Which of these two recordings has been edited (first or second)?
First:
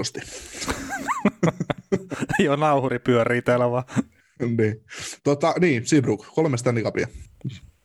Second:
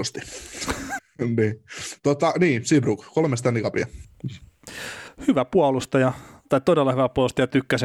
second